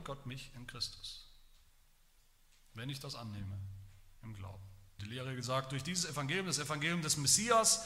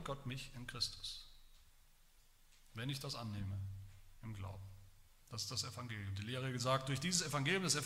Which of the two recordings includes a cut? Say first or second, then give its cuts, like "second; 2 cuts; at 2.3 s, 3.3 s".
first; 1 cut; at 5.0 s